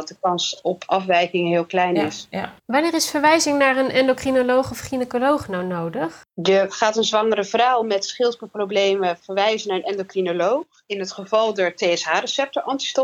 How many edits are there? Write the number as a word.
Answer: two